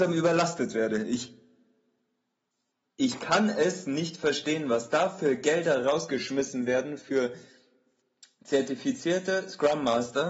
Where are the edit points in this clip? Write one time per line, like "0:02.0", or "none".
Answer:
none